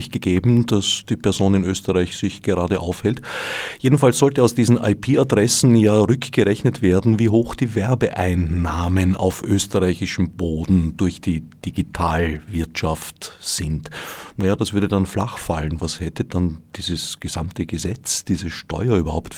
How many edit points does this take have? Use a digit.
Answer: 0